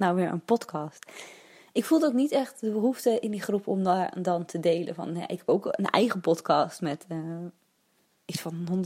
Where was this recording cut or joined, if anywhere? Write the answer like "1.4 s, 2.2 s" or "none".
none